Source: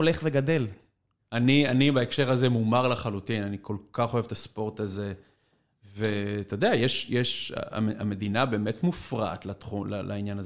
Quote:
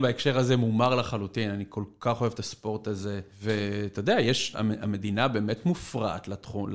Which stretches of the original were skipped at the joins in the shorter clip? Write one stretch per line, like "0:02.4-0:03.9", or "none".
0:05.2-0:05.8
0:07.1-0:07.7